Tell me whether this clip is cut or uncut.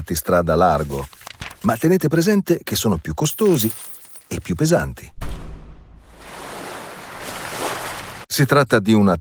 cut